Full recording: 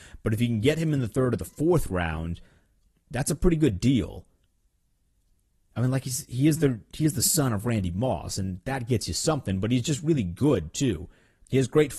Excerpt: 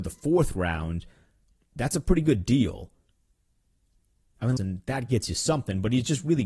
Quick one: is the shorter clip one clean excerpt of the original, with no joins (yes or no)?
no